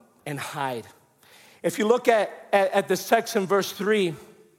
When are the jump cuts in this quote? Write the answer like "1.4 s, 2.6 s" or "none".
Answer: none